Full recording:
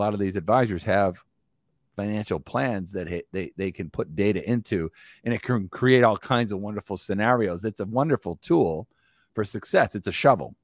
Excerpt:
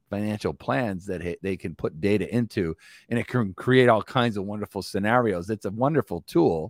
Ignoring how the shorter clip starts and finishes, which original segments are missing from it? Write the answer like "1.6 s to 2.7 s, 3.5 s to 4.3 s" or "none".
3.2 s to 3.5 s